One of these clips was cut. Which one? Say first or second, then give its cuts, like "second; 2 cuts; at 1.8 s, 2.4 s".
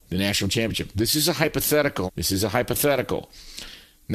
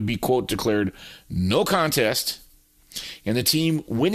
first; 1 cut; at 2.1 s